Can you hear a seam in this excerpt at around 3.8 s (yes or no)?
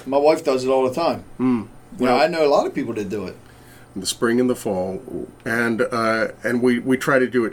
yes